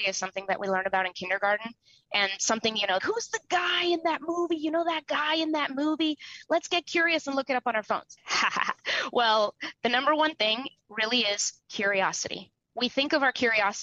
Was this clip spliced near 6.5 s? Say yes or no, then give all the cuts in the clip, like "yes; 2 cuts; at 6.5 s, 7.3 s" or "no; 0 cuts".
no; 2 cuts; at 3.0 s, 8.2 s